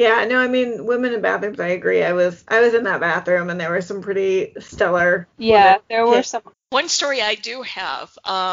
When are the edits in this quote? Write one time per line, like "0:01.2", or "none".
0:05.3
0:06.5